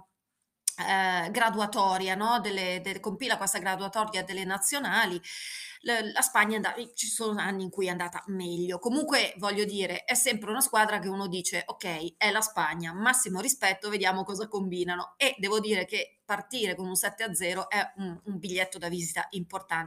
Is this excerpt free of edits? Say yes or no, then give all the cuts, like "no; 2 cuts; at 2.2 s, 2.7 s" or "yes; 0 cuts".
yes; 0 cuts